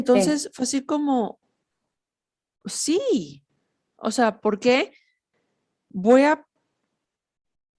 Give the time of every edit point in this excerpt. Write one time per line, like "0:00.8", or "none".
none